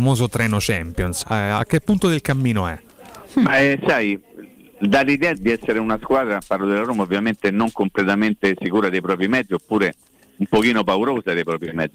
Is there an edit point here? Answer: yes; 2 cuts; at 1.2 s, 5.3 s

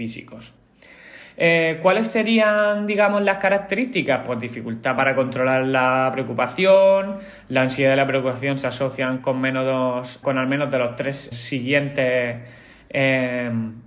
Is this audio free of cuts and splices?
no; 2 cuts; at 10.2 s, 11.3 s

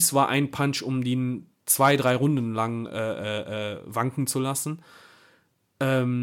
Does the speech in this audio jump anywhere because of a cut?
no; 0 cuts

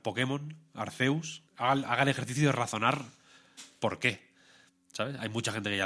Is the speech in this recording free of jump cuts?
no; 1 cut; at 1.5 s

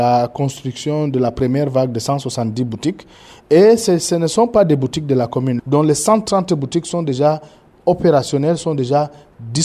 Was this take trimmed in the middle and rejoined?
yes; 1 cut; at 5.6 s

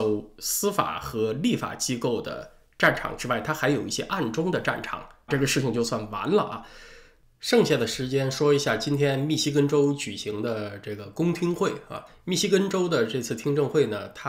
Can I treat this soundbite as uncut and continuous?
no; 1 cut; at 5.3 s

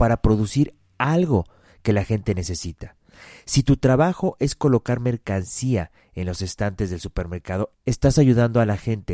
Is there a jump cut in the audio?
no; 0 cuts

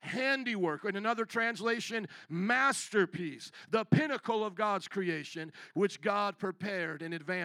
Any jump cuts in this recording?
yes; 1 cut; at 5.7 s

